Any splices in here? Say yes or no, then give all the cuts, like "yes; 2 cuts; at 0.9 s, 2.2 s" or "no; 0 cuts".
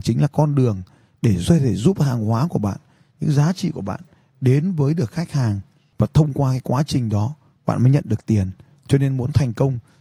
no; 0 cuts